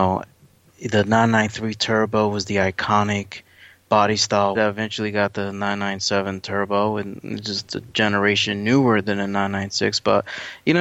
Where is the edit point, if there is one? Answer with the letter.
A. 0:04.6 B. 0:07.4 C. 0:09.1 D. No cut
A